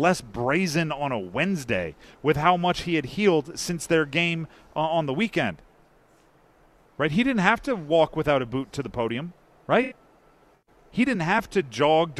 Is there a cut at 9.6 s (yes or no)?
yes